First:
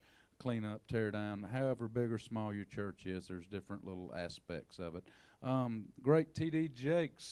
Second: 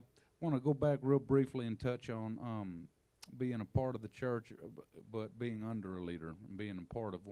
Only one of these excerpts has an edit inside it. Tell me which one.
second; 1 cut; at 5.0 s

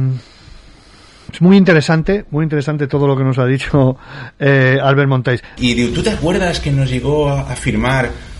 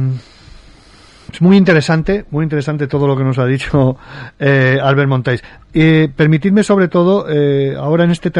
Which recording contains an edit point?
first; 1 cut; at 5.6 s

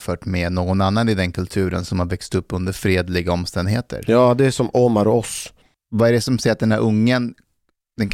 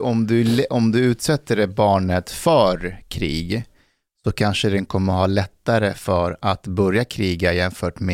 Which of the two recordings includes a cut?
first; 1 cut; at 5.7 s

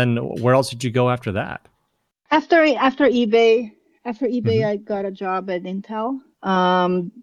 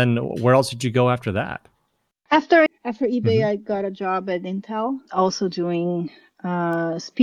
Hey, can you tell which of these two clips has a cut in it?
second; 2 cuts; at 2.7 s, 5.1 s

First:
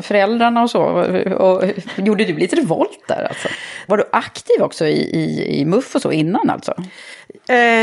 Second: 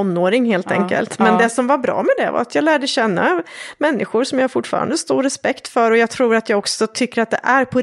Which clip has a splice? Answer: first; 1 cut; at 3.9 s

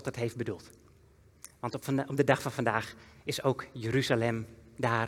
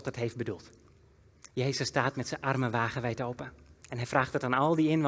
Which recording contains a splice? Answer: second; 1 cut; at 1.5 s

